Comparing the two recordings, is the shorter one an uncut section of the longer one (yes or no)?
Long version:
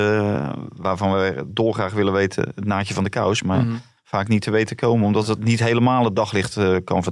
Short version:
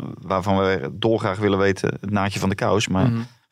yes